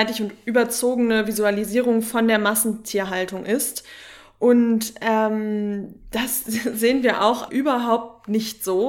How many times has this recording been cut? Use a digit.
1